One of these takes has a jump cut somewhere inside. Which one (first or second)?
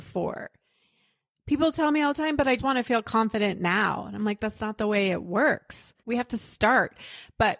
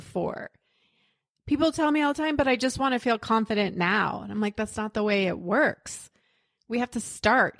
first